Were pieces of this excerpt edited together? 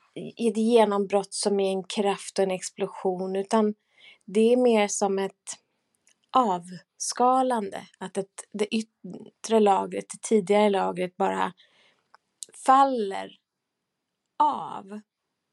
no; 0 cuts

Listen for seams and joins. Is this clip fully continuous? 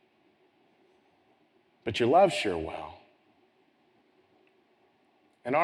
yes; 0 cuts

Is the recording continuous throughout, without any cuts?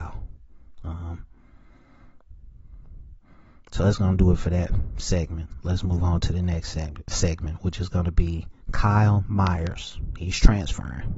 no; 1 cut; at 8.6 s

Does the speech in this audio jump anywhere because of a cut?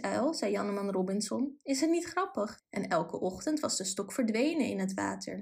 yes; 1 cut; at 2.6 s

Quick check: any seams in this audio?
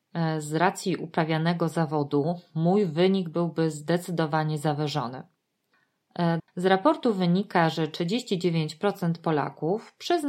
yes; 1 cut; at 6.4 s

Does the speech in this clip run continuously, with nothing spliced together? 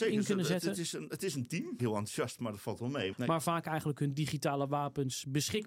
no; 2 cuts; at 1.8 s, 3.1 s

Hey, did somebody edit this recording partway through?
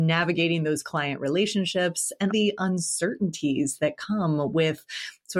yes; 1 cut; at 2.3 s

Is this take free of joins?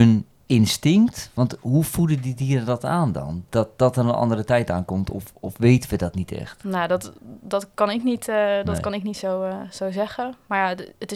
yes; 0 cuts

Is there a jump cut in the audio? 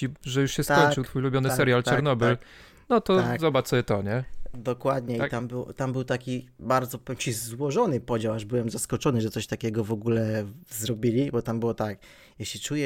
no; 0 cuts

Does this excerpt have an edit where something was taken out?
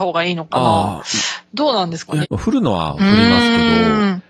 yes; 1 cut; at 2.2 s

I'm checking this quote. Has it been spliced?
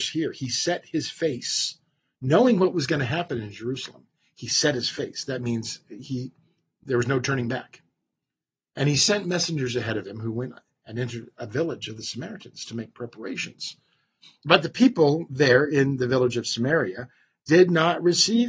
no; 0 cuts

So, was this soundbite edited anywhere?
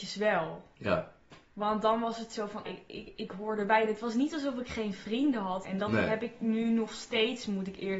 yes; 2 cuts; at 2.6 s, 5.6 s

